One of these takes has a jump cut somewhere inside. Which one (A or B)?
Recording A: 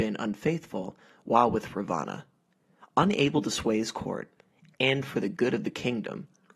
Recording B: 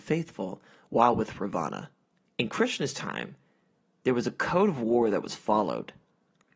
B